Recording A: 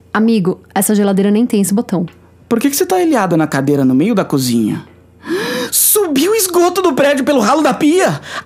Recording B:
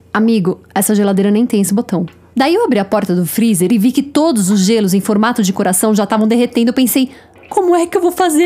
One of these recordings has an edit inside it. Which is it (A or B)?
B